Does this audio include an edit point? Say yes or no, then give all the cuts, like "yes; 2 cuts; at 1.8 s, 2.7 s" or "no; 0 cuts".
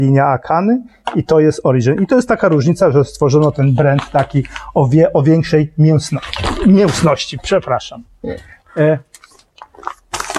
no; 0 cuts